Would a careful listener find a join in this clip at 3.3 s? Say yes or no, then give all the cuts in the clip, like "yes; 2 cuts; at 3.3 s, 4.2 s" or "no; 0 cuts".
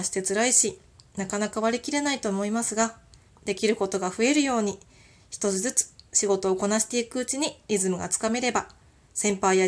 yes; 1 cut; at 3.3 s